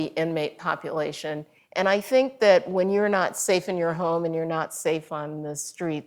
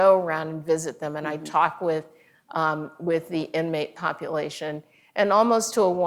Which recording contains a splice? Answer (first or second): first